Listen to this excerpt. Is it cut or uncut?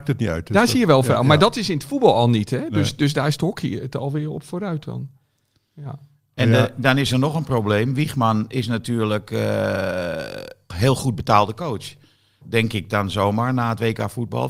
cut